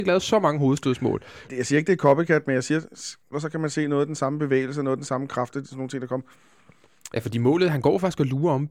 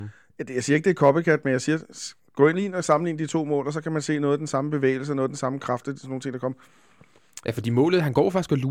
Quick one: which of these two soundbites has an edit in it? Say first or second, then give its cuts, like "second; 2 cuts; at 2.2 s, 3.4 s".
first; 2 cuts; at 1.5 s, 3.3 s